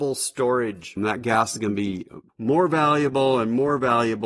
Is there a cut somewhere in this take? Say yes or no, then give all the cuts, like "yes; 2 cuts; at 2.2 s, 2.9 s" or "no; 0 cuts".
yes; 2 cuts; at 1.0 s, 2.3 s